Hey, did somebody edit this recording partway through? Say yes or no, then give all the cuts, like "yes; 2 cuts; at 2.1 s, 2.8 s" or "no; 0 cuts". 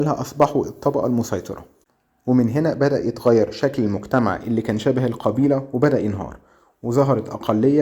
no; 0 cuts